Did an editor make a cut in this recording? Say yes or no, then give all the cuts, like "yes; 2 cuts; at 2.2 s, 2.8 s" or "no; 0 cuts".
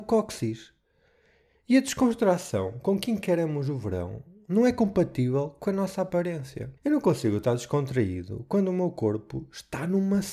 yes; 1 cut; at 6.8 s